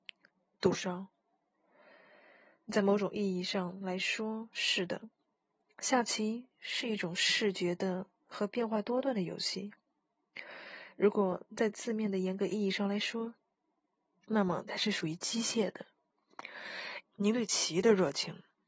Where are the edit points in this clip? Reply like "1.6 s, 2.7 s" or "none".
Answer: 14.2 s, 17.0 s